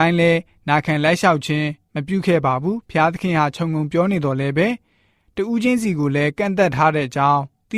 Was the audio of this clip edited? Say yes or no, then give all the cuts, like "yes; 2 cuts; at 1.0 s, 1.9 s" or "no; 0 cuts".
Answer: no; 0 cuts